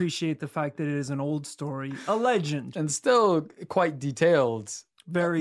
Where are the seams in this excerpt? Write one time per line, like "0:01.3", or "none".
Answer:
0:02.7